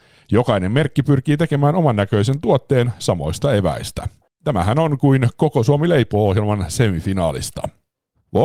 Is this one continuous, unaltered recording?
yes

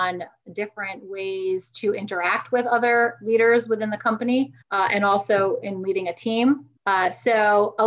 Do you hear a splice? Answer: yes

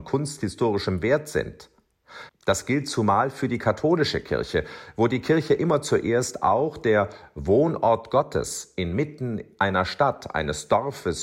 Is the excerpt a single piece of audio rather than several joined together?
no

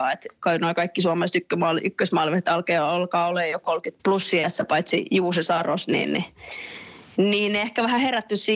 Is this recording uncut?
no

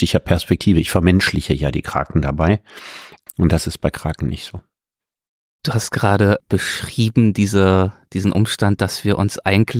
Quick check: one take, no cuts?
no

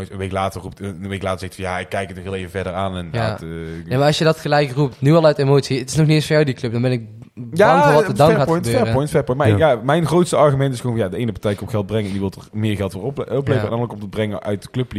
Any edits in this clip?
no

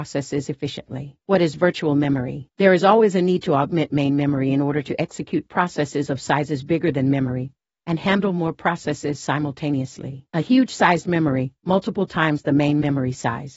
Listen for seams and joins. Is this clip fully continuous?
yes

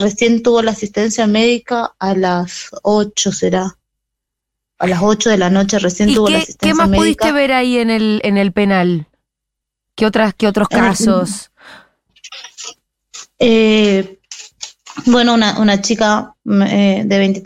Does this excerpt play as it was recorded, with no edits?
yes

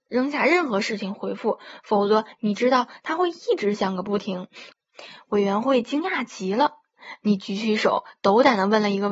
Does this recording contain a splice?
yes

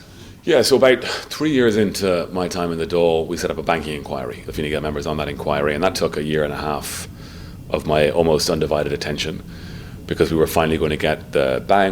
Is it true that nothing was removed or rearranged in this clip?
no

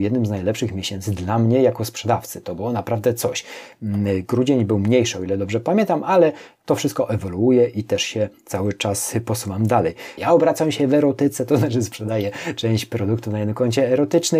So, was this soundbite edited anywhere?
yes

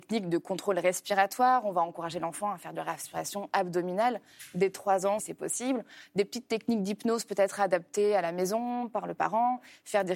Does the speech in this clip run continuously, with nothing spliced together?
no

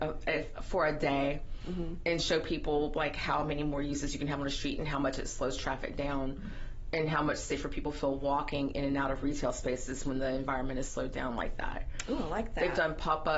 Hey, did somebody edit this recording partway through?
no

